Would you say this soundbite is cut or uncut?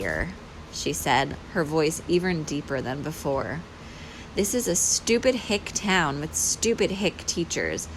cut